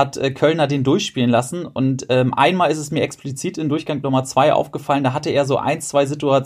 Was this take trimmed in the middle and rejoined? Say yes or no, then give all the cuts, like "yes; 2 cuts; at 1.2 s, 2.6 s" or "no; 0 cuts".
no; 0 cuts